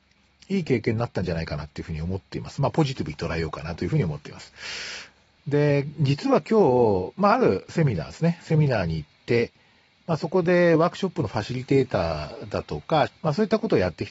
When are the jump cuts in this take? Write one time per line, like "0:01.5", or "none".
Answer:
0:05.4
0:13.1